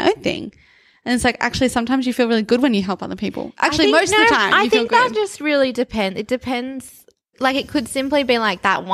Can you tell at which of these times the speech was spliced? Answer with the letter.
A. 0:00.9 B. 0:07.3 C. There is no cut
B